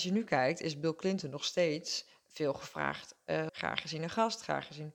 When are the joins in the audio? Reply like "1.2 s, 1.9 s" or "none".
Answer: 3.5 s

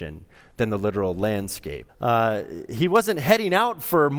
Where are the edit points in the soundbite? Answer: 1.9 s

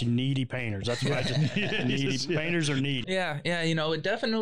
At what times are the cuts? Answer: 3.0 s

